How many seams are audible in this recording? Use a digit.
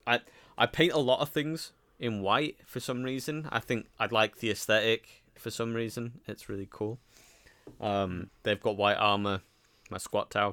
1